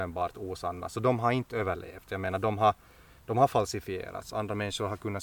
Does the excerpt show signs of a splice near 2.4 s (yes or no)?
no